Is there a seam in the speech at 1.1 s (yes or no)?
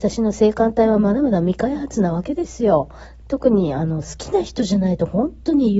no